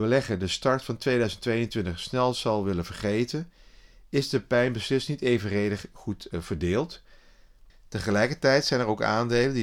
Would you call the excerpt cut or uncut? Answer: cut